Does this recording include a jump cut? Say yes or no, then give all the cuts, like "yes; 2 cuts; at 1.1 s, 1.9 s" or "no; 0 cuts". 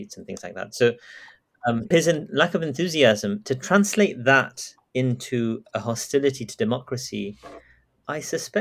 yes; 1 cut; at 1.9 s